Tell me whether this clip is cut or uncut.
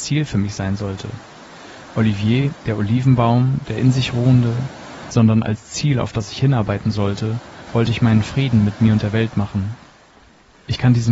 cut